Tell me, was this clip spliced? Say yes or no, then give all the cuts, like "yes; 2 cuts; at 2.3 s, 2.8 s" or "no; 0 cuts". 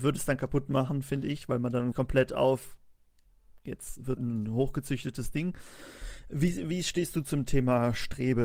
yes; 2 cuts; at 1.9 s, 4.2 s